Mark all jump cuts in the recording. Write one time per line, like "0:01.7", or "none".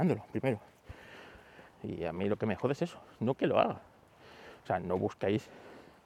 0:01.7
0:04.6